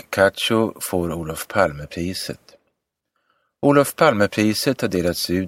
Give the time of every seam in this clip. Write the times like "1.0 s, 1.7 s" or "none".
none